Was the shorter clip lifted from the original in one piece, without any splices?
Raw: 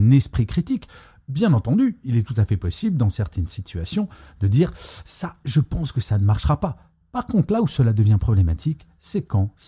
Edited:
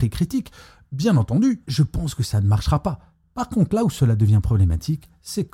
no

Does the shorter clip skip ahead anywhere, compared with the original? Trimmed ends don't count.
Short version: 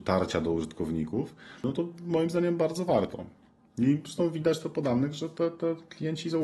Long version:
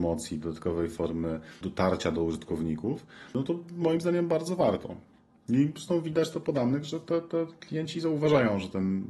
no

